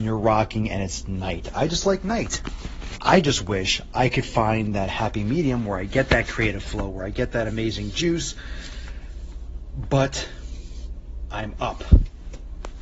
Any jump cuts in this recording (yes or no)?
yes